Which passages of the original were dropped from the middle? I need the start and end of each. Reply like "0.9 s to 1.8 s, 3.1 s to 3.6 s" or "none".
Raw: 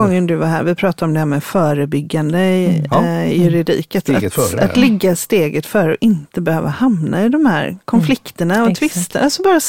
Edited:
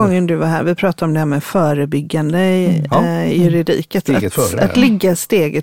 none